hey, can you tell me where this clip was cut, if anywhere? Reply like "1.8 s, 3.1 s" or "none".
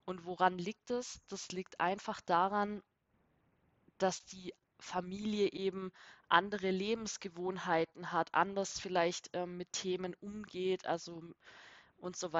none